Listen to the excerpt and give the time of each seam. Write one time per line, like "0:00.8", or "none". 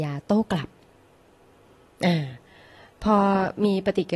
none